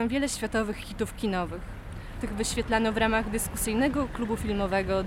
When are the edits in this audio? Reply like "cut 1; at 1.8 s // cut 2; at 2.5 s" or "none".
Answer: cut 1; at 2.2 s